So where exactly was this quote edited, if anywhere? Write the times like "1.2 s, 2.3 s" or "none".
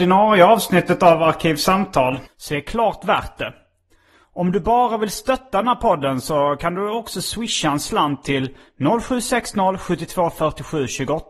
2.3 s

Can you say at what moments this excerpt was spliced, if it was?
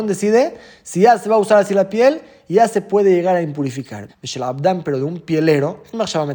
4.1 s

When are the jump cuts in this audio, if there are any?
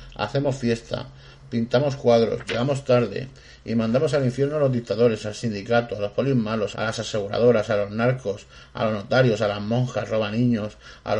6.7 s

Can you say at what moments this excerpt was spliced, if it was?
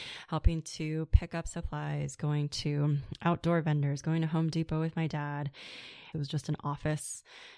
6.1 s

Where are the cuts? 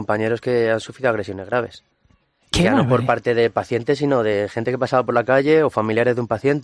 none

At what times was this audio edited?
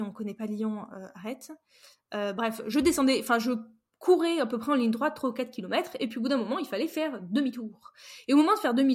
none

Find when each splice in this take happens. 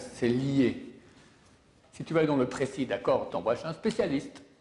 1.8 s, 3.3 s

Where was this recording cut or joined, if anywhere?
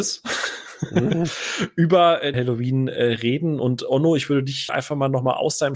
2.3 s, 4.7 s

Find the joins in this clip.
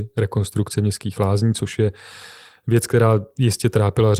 none

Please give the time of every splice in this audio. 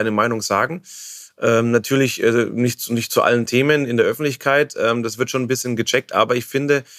none

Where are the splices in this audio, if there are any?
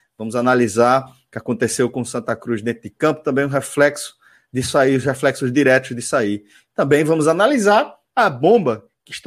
none

